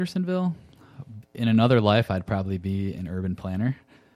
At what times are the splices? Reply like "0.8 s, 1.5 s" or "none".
1.2 s